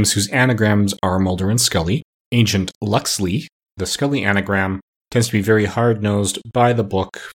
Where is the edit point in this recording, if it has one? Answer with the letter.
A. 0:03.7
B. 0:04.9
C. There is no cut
C